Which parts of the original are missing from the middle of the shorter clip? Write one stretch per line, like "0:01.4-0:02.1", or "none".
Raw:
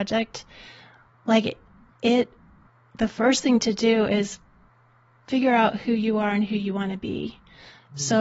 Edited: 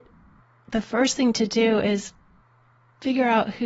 none